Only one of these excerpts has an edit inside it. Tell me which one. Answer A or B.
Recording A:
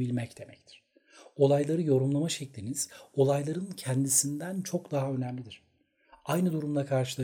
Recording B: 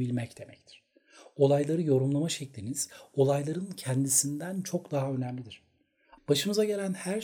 B